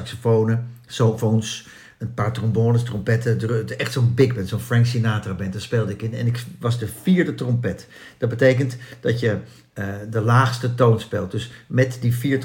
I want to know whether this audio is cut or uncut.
uncut